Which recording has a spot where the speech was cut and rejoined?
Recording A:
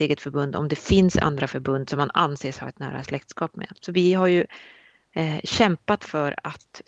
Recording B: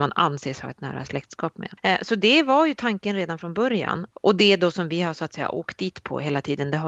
B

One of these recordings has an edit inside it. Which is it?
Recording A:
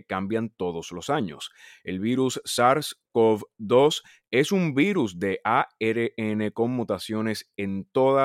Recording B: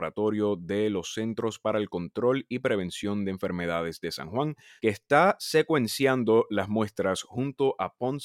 B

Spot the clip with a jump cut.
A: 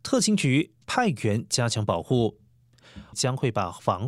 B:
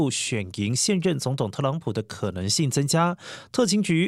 A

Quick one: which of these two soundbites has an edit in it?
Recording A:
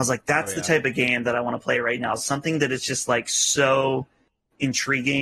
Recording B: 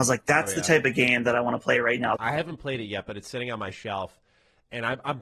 B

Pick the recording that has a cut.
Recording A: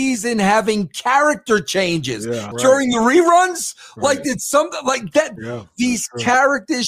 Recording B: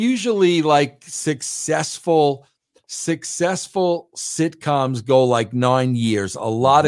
A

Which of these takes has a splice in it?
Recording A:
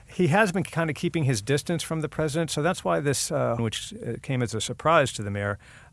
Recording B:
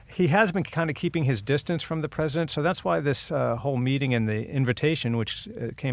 A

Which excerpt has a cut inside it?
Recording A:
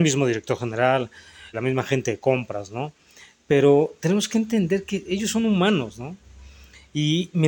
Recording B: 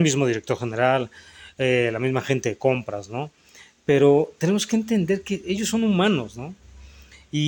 A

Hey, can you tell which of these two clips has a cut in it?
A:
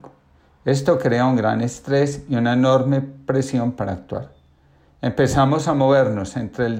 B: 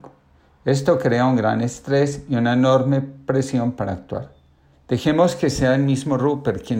B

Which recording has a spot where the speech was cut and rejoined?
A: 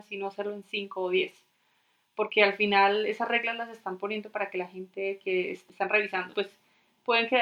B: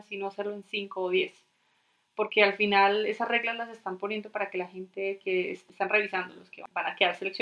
A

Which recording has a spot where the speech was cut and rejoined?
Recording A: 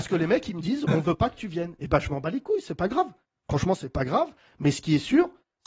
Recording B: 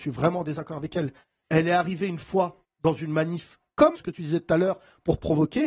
B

